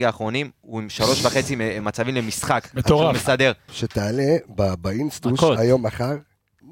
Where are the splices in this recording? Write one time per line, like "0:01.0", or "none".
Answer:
0:03.7